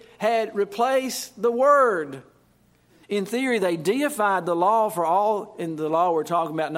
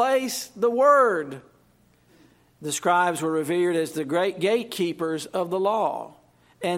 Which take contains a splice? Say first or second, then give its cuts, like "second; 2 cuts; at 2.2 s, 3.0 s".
first; 1 cut; at 3.0 s